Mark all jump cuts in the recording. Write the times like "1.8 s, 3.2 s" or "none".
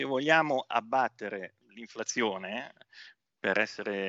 1.6 s